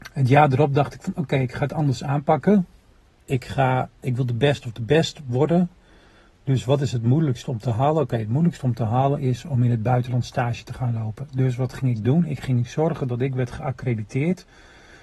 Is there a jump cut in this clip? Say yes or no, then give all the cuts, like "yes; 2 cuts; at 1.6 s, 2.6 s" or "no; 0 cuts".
yes; 1 cut; at 4.0 s